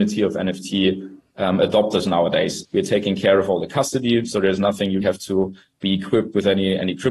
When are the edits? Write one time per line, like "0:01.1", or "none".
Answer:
0:02.6
0:05.0